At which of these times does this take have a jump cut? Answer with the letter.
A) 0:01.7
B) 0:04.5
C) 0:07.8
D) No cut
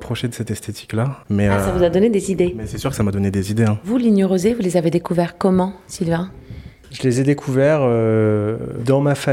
D